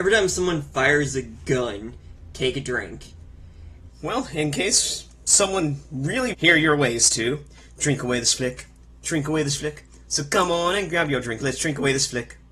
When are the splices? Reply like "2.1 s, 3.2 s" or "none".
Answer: 3.9 s, 6.3 s